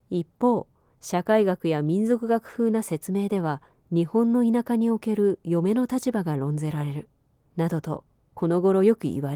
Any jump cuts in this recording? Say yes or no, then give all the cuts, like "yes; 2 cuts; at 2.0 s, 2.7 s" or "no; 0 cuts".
yes; 1 cut; at 7.4 s